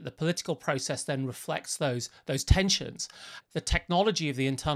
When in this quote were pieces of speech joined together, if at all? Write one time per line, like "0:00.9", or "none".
0:03.4